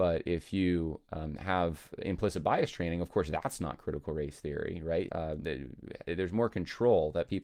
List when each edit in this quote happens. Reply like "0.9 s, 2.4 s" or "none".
5.1 s